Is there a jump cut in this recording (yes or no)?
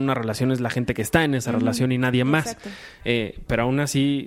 yes